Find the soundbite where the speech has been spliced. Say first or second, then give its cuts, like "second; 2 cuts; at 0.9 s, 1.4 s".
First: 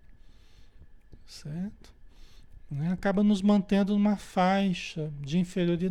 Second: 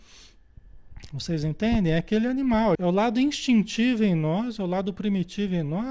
second; 1 cut; at 2.8 s